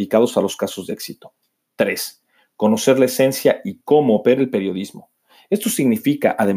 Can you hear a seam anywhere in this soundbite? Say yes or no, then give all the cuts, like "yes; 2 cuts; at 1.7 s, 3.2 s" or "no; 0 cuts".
no; 0 cuts